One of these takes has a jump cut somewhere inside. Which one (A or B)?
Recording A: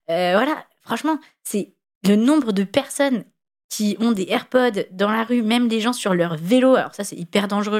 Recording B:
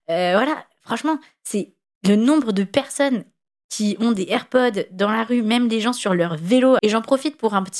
B